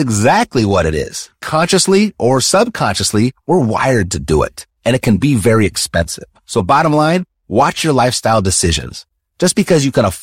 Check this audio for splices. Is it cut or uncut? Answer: uncut